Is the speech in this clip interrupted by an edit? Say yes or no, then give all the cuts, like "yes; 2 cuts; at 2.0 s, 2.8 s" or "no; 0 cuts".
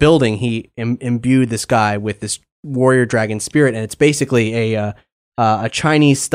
no; 0 cuts